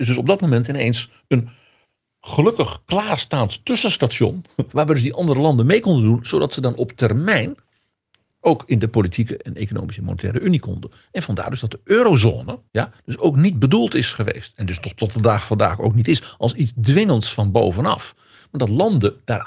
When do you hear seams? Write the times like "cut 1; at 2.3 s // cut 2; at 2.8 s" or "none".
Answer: cut 1; at 4.7 s // cut 2; at 12.7 s